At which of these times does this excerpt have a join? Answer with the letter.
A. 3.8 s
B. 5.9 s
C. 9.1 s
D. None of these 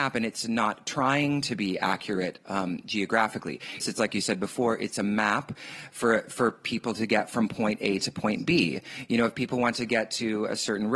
A